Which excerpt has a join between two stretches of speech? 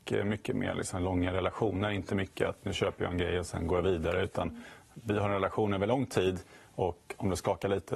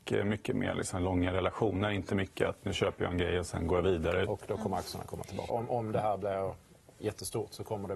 second; 2 cuts; at 4.3 s, 5.5 s

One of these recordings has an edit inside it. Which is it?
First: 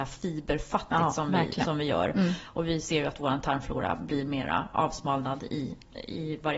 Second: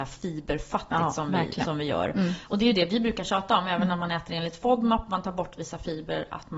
second; 1 cut; at 2.4 s

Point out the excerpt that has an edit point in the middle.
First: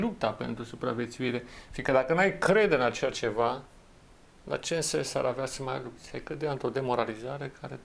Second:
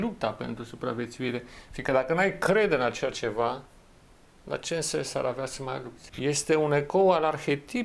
second; 1 cut; at 6.1 s

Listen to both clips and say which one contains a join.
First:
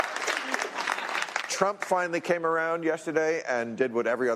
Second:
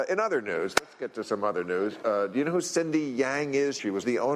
first; 1 cut; at 1.4 s

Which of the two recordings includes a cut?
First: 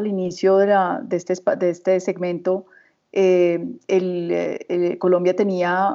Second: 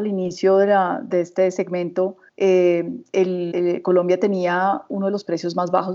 second; 3 cuts; at 1.1 s, 2.3 s, 3.5 s

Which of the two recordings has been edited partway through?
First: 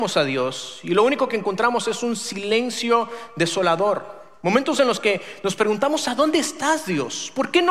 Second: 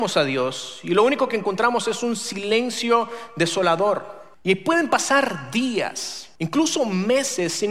second; 2 cuts; at 4.3 s, 6.4 s

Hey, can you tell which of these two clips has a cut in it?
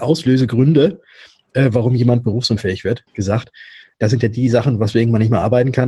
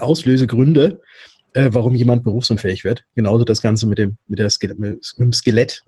first; 1 cut; at 3.1 s

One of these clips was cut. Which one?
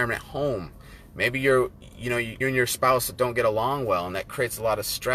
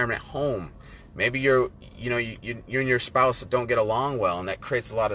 first; 1 cut; at 2.4 s

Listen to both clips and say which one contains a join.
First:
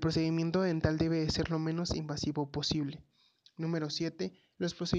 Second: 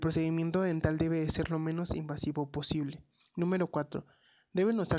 second; 1 cut; at 3.2 s

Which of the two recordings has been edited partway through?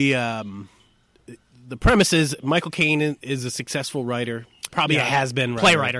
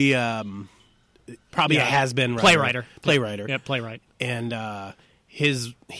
second; 1 cut; at 1.5 s

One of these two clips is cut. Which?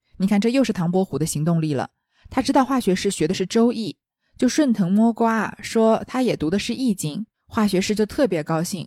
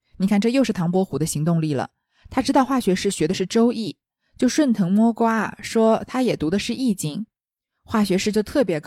first; 1 cut; at 7.3 s

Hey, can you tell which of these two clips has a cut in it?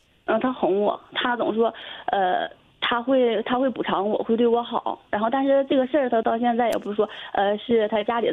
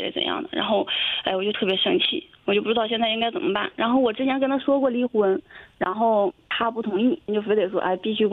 second; 1 cut; at 7.3 s

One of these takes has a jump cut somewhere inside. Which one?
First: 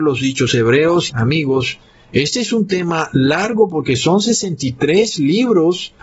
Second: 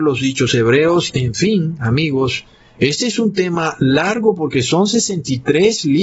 first; 1 cut; at 1.1 s

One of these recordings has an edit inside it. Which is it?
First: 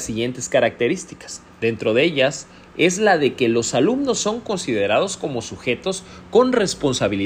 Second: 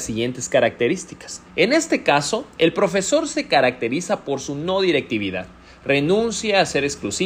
second; 1 cut; at 1.5 s

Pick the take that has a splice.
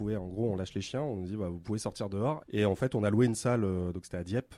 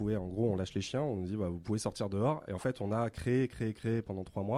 first; 1 cut; at 2.4 s

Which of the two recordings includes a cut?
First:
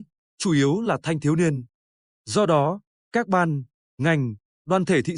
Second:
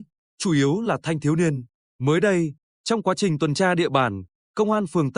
second; 1 cut; at 1.8 s

